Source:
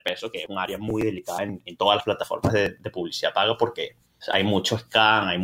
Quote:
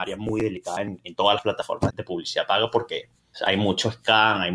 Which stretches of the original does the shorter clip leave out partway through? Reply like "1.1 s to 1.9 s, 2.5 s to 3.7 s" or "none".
2.5 s to 2.8 s